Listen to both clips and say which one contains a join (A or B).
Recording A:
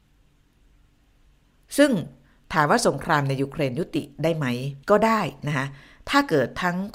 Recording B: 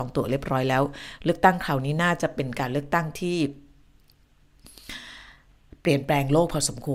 A